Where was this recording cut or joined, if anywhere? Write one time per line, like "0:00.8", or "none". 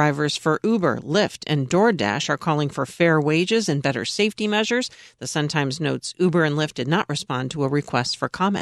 none